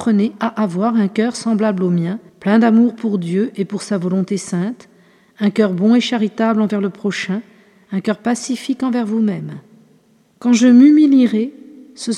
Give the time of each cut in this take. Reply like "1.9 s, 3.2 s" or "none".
2.3 s